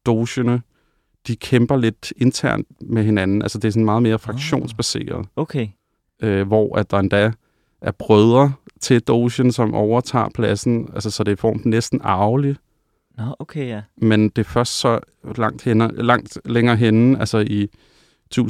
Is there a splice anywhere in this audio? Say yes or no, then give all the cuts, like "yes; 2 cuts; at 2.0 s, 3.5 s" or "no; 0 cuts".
no; 0 cuts